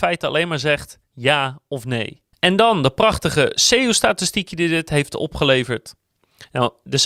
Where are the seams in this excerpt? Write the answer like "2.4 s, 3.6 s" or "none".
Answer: none